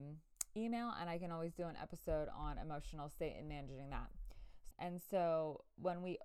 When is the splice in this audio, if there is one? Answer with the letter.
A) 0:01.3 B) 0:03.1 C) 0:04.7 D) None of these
C